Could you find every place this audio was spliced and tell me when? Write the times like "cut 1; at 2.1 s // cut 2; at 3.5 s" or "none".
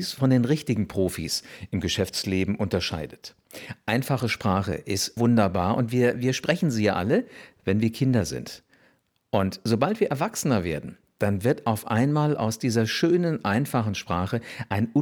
cut 1; at 5.2 s